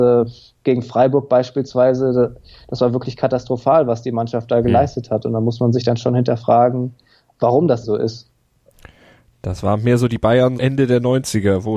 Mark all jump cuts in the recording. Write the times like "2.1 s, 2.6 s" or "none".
7.8 s, 10.6 s